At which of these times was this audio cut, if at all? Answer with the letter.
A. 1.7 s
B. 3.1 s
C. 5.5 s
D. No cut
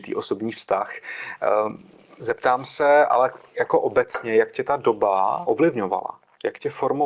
C